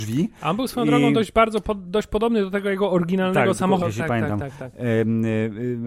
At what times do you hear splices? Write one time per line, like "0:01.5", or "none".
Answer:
0:03.8

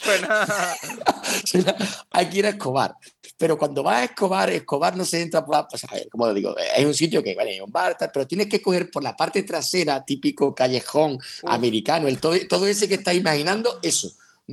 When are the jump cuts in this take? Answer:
none

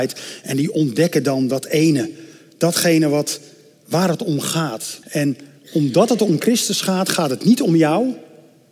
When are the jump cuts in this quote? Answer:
0:05.0

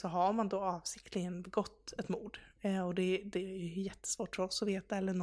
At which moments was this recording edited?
none

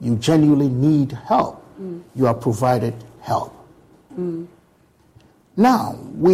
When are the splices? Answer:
0:04.1

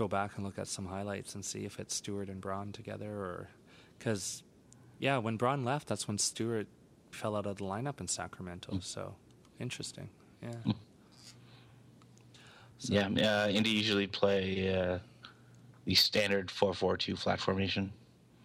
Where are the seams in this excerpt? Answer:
0:07.1

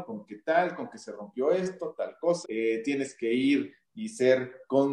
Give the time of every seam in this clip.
0:02.4

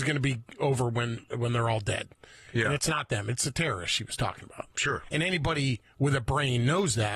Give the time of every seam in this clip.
none

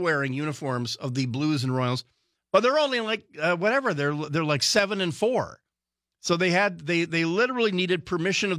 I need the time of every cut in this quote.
none

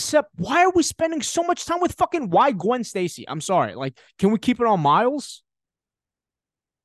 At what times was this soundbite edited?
none

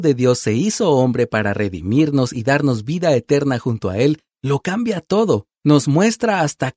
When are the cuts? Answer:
0:05.5

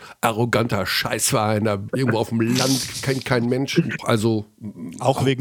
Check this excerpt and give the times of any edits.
0:01.9
0:04.0

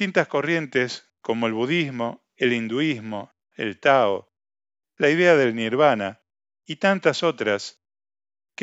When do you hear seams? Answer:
0:03.5

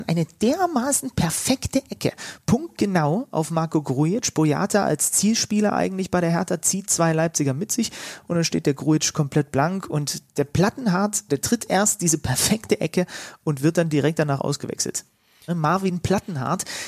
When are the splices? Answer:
0:11.3
0:15.5

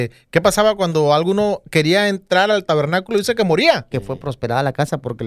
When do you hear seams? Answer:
0:03.9

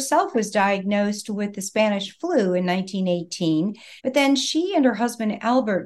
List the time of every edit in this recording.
0:04.0

